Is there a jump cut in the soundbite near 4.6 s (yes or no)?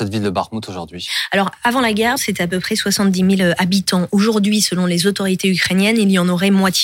no